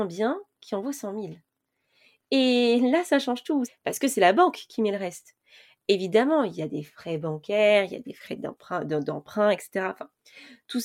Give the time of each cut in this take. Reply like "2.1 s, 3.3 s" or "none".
3.7 s